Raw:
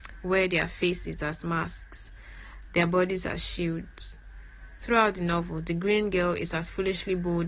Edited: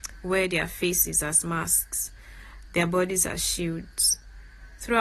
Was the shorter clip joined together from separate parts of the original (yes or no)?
no